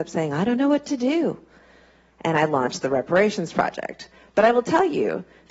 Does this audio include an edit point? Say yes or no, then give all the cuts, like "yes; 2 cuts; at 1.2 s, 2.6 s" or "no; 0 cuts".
no; 0 cuts